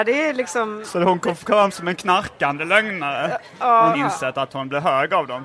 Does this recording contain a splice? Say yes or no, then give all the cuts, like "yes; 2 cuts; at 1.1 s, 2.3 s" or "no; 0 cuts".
yes; 1 cut; at 3.9 s